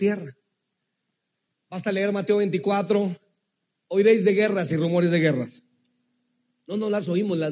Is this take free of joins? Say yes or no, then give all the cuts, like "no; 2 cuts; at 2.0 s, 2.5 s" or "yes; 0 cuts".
no; 1 cut; at 1.5 s